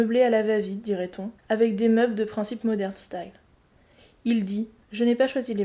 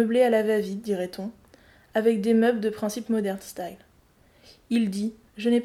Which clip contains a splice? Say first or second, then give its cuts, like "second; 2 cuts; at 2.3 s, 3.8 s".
first; 1 cut; at 1.4 s